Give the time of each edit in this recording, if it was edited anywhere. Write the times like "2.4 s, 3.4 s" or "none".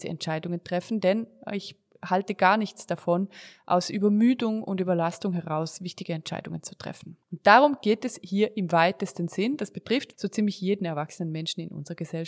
7.2 s, 10.1 s